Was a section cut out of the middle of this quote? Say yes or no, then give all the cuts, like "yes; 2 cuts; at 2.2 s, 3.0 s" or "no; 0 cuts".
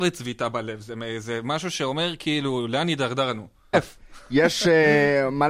yes; 1 cut; at 3.7 s